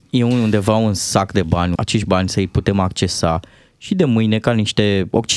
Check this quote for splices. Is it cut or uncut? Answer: cut